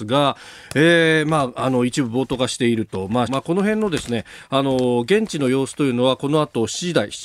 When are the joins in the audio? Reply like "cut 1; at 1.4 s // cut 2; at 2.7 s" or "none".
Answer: cut 1; at 3.3 s